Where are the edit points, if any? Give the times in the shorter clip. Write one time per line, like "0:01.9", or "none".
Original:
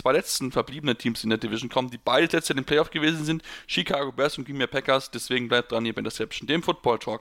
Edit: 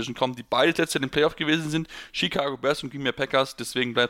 none